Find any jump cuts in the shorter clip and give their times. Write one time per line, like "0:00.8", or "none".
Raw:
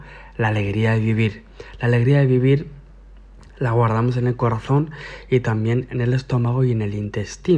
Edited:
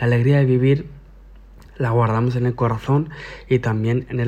none